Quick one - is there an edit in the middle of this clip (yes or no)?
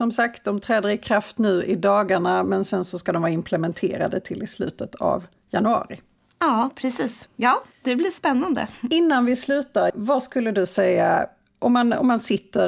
yes